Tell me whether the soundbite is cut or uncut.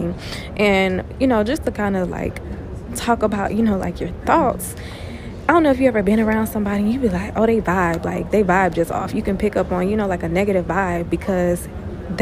uncut